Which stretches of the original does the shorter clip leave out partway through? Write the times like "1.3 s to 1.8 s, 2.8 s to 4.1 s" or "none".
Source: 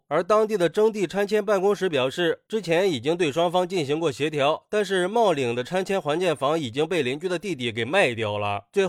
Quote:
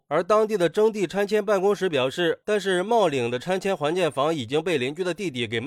2.4 s to 4.7 s